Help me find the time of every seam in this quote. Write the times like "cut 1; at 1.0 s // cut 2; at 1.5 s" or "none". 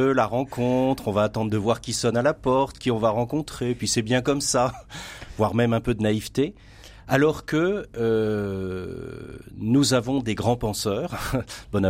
none